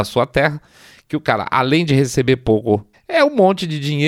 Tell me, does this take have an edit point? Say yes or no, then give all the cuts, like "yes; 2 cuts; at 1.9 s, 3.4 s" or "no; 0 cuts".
yes; 1 cut; at 2.9 s